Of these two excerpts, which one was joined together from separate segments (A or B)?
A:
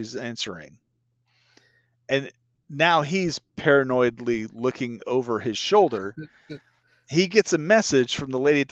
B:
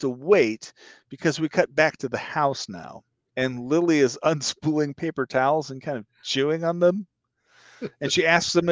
B